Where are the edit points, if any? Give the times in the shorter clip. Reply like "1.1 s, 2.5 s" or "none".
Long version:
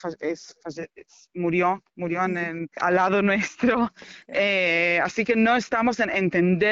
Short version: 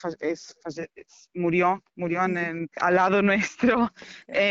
none